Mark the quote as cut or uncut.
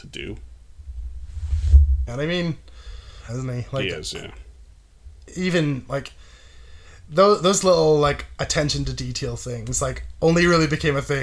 cut